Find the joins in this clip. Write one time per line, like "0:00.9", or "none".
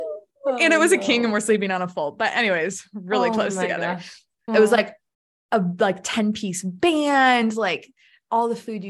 0:04.5

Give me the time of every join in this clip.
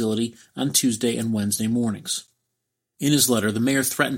none

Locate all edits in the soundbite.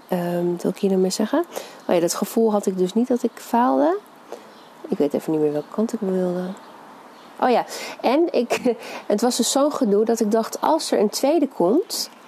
none

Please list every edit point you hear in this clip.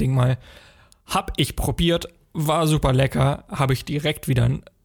none

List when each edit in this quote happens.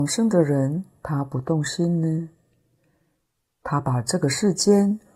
none

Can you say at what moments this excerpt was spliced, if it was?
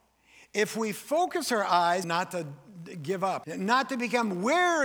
0:02.0
0:03.4

